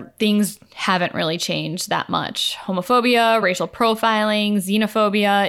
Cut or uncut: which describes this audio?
uncut